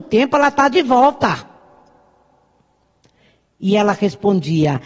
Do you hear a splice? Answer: no; 0 cuts

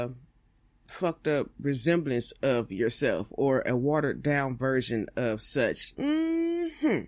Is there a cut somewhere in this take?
yes; 1 cut; at 5.9 s

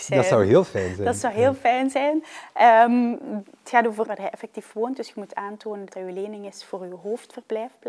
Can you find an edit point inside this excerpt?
yes; 2 cuts; at 4.0 s, 5.9 s

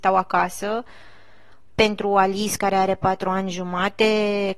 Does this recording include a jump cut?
no; 0 cuts

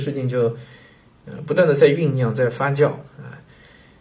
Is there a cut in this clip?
no; 0 cuts

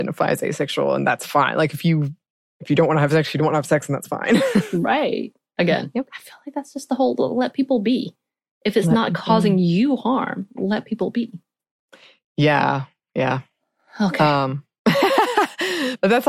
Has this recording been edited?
no; 0 cuts

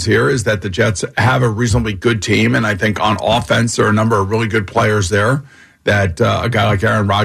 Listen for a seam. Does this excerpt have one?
no; 0 cuts

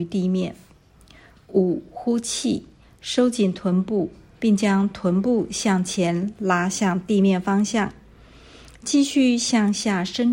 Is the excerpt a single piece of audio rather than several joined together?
yes; 0 cuts

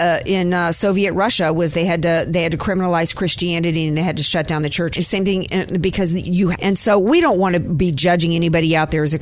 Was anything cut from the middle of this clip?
yes; 2 cuts; at 5.0 s, 6.6 s

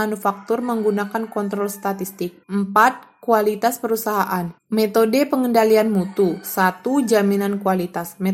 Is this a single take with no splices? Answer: no; 2 cuts; at 2.4 s, 4.6 s

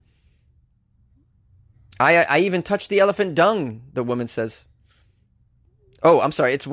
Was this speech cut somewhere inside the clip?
no; 0 cuts

